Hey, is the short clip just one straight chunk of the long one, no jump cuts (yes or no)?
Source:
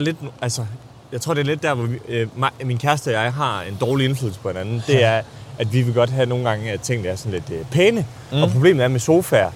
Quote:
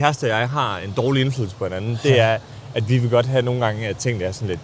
yes